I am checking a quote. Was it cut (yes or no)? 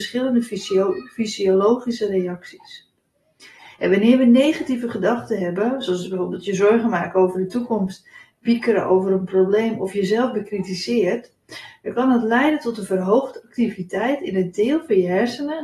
no